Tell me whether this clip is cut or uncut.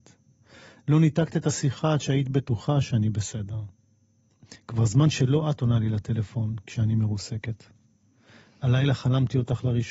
uncut